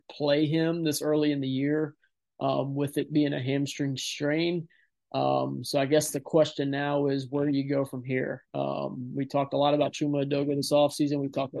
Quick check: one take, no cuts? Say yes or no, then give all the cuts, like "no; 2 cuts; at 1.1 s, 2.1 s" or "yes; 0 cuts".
yes; 0 cuts